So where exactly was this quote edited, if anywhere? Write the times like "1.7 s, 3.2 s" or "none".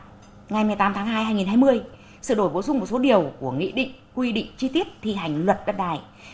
none